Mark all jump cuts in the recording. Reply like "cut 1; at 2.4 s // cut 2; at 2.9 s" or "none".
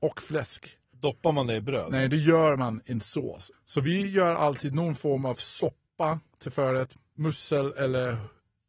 cut 1; at 3.5 s